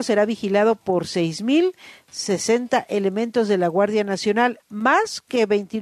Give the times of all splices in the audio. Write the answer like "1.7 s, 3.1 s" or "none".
4.6 s